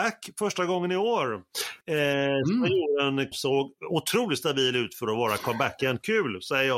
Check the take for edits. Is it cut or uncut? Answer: cut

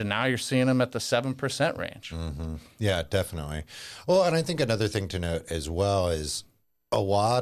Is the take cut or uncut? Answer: uncut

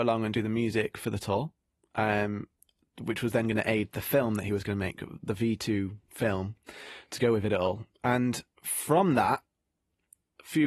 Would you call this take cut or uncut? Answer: uncut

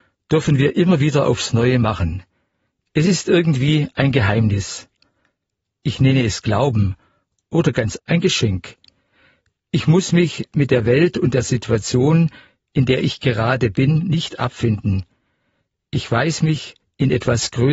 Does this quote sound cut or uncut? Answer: cut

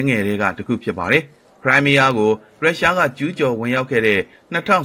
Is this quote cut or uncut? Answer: uncut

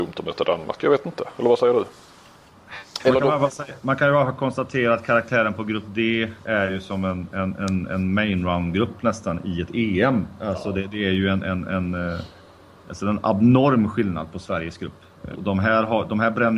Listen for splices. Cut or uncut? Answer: cut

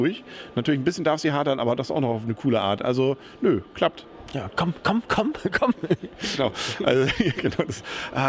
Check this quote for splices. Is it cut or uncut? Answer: uncut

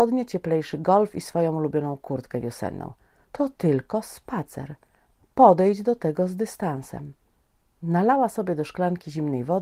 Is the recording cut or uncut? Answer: cut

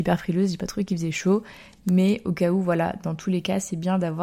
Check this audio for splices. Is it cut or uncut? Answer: uncut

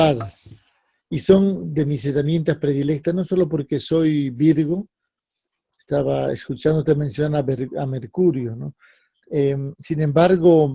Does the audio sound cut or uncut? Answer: cut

